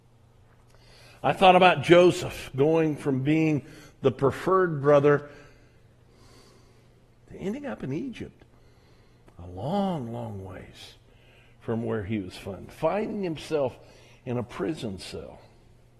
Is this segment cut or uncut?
uncut